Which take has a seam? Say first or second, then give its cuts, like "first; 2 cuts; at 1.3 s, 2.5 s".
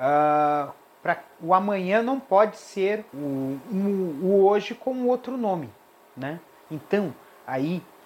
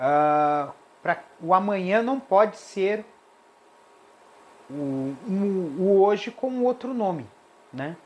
first; 2 cuts; at 3.1 s, 6.7 s